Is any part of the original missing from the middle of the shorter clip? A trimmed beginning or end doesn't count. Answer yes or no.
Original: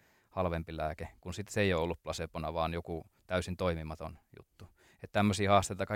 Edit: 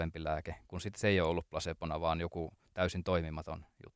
no